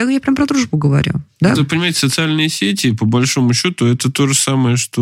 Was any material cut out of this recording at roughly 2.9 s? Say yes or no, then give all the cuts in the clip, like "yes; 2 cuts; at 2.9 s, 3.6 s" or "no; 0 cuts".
no; 1 cut; at 1.5 s